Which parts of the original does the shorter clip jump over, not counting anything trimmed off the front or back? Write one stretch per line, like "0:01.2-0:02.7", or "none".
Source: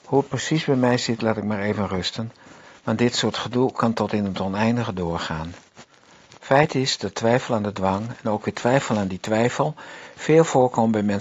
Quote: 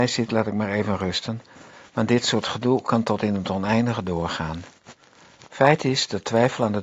none